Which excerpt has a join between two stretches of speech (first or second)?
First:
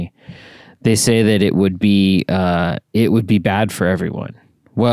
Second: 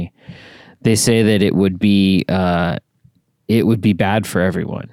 first